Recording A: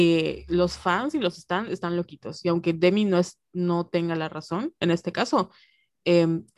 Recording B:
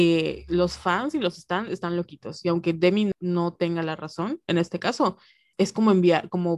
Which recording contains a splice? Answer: B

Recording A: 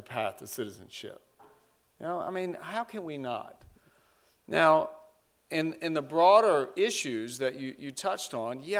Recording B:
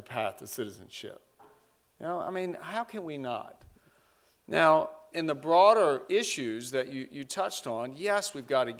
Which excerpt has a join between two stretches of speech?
B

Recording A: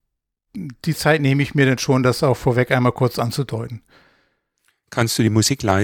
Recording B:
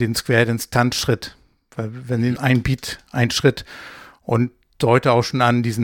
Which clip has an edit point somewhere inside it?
B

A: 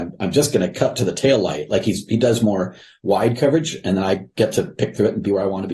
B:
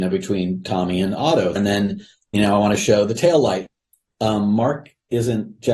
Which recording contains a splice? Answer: B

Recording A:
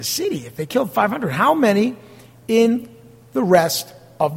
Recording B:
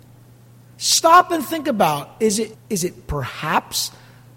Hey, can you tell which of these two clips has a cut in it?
B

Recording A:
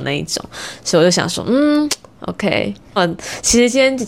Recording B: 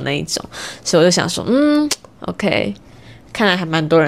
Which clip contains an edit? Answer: A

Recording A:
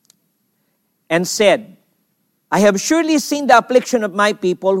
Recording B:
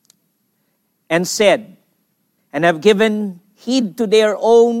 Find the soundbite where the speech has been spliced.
B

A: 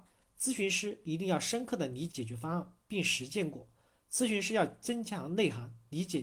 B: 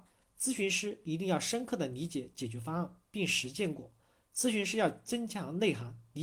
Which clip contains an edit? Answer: A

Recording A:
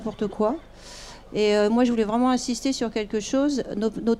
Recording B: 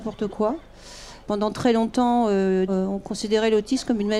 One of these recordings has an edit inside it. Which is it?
B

